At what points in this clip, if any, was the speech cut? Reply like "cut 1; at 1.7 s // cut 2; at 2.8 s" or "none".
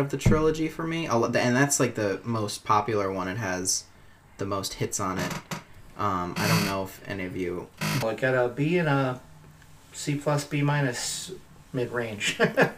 cut 1; at 8.0 s